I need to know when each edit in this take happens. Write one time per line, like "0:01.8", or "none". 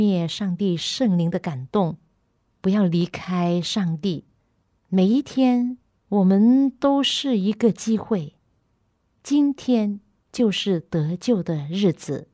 0:02.4
0:04.7